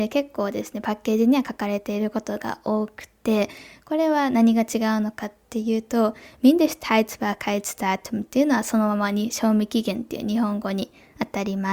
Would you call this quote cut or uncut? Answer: uncut